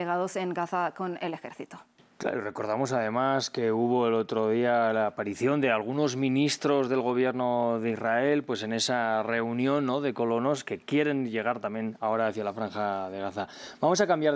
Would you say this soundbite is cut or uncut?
uncut